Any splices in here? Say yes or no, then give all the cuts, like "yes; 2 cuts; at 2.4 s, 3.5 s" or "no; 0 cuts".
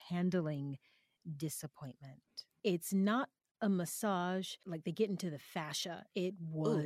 yes; 2 cuts; at 2.6 s, 4.6 s